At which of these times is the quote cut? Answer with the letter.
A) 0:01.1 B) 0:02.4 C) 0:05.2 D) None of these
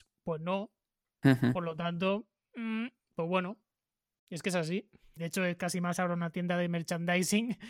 C